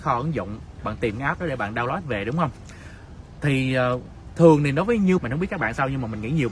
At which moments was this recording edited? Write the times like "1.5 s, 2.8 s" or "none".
5.2 s

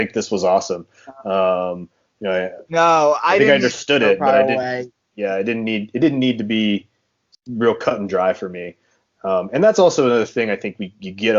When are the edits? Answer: none

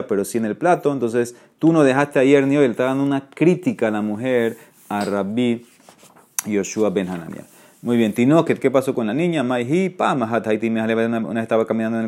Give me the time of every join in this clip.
none

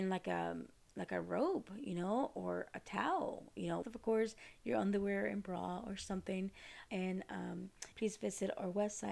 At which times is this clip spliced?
3.8 s, 6.9 s, 7.9 s

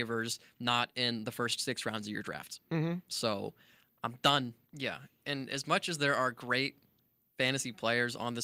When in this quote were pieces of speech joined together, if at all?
4.7 s

